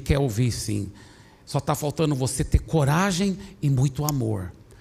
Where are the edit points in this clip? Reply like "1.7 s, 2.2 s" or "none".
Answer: none

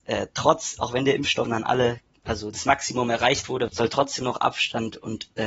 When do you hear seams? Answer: 1.4 s, 3.7 s

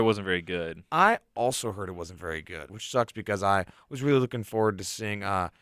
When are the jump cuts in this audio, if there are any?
2.7 s

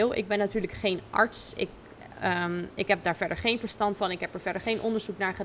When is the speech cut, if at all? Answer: none

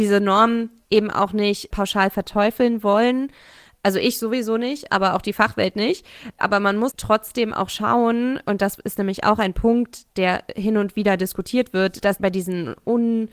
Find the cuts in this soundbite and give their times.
6.9 s

